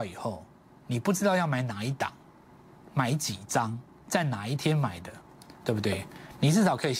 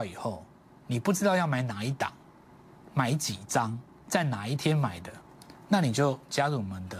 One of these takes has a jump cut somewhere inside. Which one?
first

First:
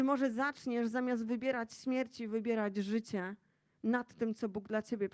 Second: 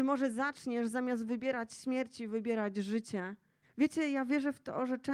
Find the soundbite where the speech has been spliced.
second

